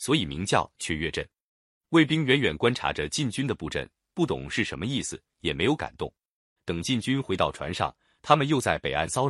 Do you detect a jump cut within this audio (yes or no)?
yes